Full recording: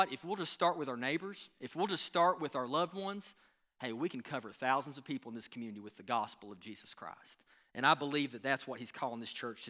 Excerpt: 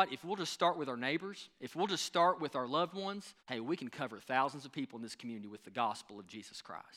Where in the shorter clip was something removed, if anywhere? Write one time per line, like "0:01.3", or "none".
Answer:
0:03.4